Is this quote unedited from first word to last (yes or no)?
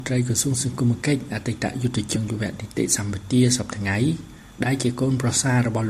no